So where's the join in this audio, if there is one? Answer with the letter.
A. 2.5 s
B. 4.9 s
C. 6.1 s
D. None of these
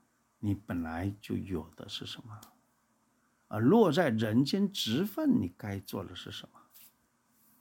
D